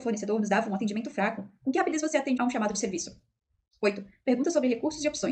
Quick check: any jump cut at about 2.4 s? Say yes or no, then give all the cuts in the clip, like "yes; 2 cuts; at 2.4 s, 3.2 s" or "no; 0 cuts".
yes; 1 cut; at 2.4 s